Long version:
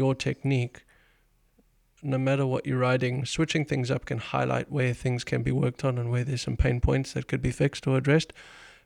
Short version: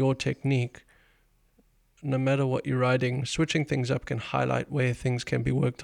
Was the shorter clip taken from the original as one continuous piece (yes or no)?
yes